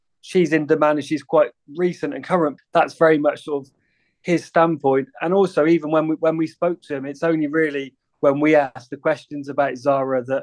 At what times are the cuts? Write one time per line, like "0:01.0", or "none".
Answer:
0:02.6